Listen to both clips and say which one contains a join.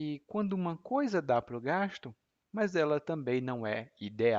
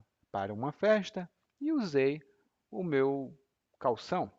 first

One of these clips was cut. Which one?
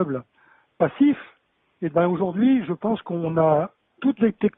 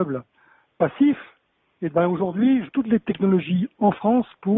second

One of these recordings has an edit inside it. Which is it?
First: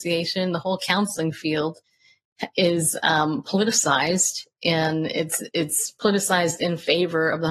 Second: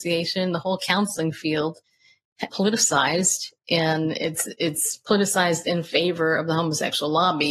second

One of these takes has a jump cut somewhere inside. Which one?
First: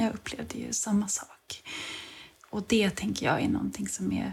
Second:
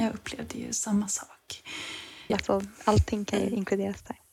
second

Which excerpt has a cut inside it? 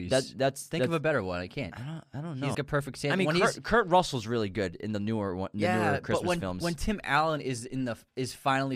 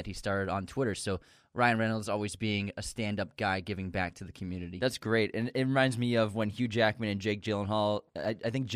first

